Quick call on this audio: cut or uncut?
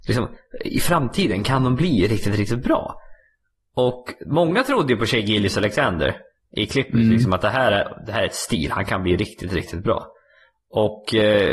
uncut